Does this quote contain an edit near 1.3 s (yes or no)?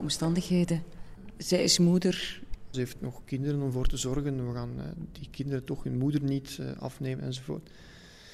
no